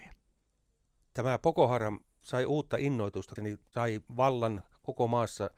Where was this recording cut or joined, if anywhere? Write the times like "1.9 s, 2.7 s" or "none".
3.4 s